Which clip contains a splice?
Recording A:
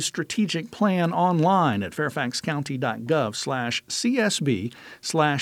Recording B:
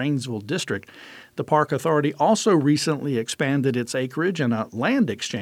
B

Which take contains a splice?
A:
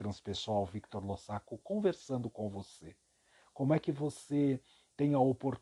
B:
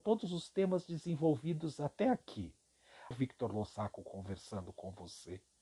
B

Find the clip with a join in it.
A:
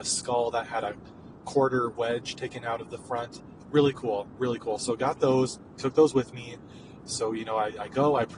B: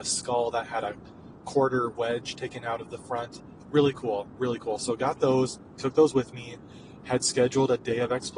A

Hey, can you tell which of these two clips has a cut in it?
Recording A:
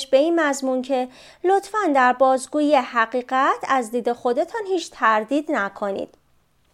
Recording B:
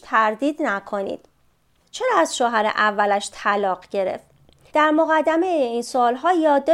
B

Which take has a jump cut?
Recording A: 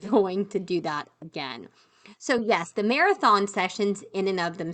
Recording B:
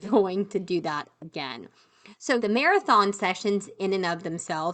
B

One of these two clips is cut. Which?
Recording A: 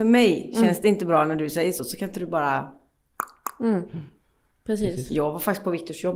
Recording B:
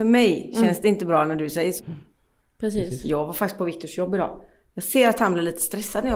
B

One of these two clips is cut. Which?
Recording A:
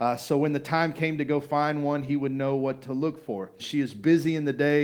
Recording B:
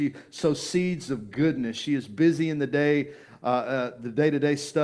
A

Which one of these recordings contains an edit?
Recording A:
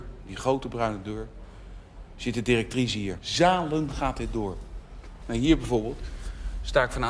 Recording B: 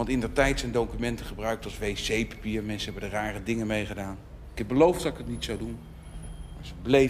A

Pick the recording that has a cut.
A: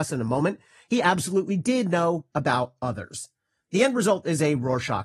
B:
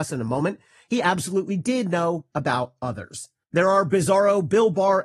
B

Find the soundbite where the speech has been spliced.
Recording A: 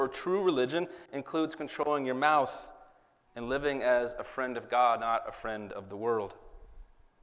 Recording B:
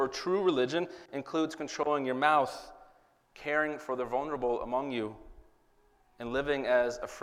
A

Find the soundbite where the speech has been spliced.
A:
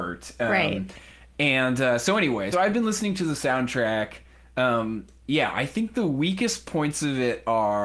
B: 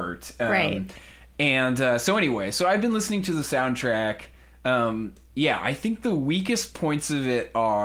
A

